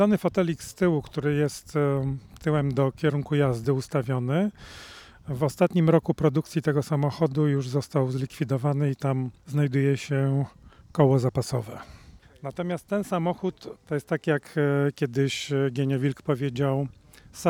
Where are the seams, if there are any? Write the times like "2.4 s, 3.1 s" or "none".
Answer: none